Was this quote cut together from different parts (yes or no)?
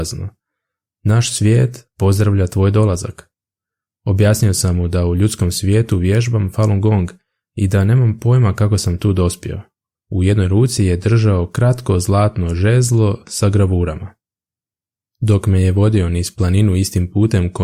yes